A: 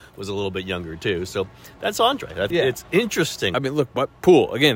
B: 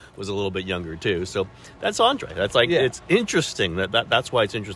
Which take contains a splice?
A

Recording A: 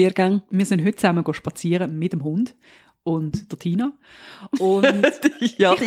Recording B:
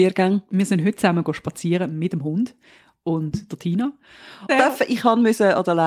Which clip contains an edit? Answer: B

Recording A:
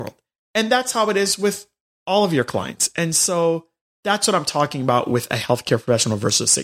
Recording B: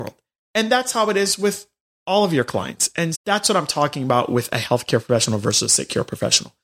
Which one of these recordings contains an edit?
B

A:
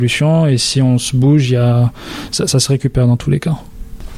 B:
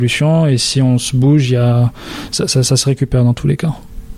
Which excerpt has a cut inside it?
A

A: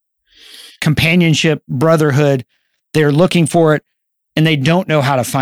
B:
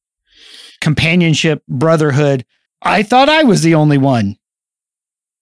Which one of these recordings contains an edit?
B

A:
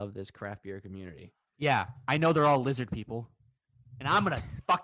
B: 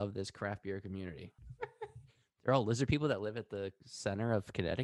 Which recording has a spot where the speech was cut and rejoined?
B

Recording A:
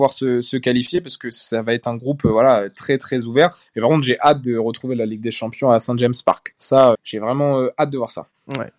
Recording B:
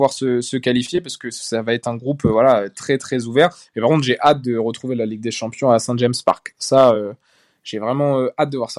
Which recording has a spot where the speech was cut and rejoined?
A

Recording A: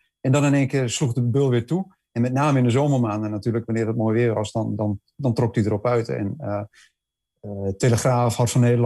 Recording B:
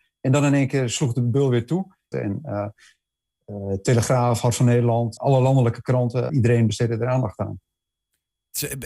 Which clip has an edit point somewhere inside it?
B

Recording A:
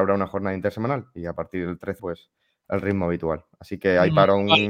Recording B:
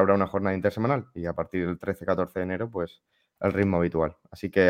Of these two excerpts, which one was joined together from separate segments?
A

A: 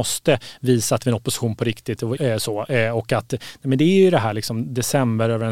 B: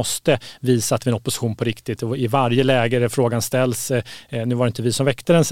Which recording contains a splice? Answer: A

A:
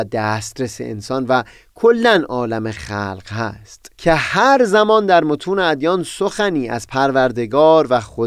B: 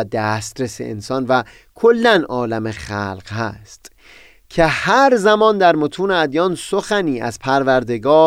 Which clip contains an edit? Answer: A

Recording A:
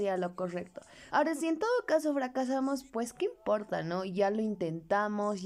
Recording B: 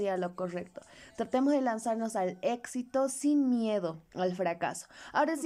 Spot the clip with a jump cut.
A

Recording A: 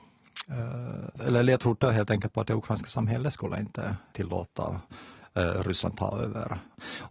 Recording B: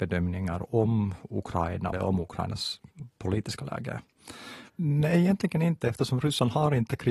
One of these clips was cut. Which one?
B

